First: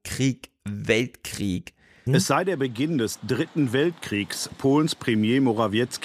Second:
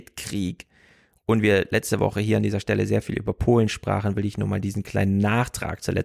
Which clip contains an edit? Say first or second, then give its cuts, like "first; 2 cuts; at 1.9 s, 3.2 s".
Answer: first; 2 cuts; at 2.1 s, 4.5 s